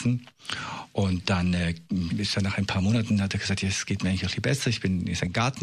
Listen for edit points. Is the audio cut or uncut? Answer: cut